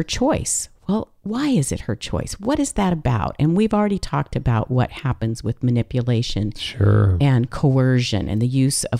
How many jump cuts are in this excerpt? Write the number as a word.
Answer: zero